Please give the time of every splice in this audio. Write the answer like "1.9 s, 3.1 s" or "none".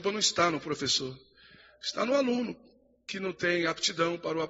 none

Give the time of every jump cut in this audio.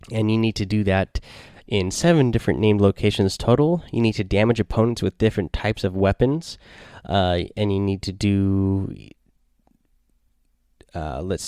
none

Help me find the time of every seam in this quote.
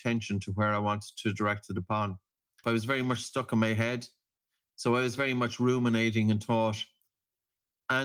2.6 s

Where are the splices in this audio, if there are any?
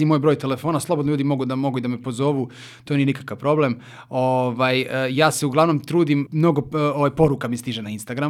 6.3 s

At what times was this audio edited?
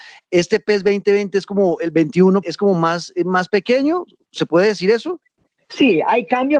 2.4 s

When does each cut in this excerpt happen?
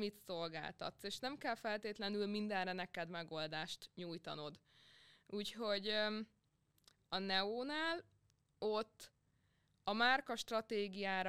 none

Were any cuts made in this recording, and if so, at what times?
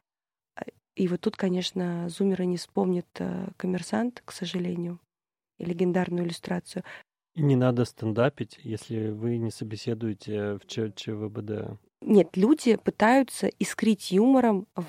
none

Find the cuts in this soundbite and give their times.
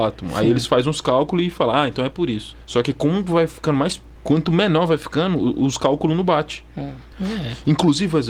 4.2 s, 7.1 s

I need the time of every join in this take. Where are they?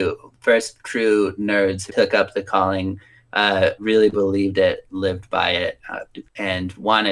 1.9 s, 3.8 s

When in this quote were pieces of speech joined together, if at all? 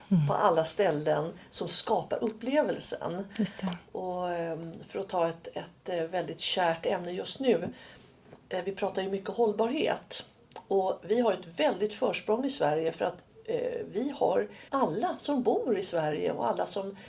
14.7 s

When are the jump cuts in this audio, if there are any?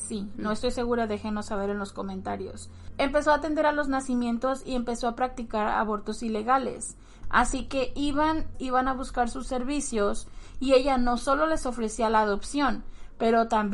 7.2 s, 8.5 s

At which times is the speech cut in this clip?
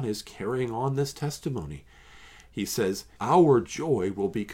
3.2 s

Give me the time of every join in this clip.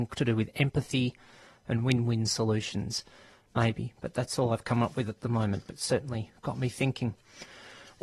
none

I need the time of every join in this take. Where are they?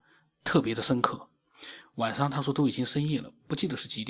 none

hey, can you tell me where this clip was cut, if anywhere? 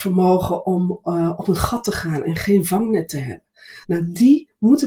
3.8 s

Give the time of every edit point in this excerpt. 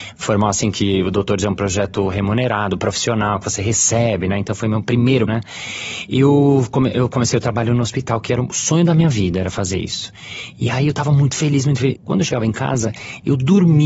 5.3 s, 12.0 s

